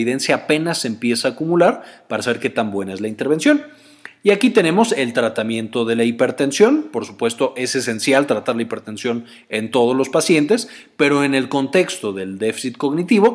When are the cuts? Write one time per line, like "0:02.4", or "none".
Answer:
none